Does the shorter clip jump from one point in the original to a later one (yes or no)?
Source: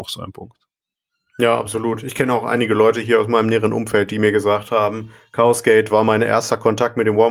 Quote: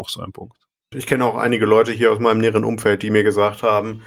yes